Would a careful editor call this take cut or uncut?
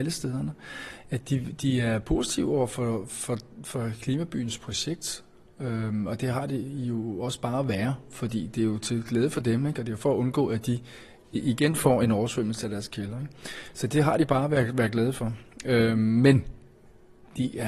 uncut